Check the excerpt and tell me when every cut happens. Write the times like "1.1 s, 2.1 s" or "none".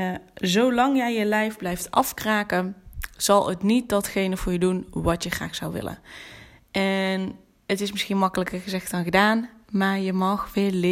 none